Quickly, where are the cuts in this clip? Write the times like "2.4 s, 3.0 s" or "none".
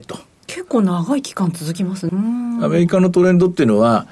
2.1 s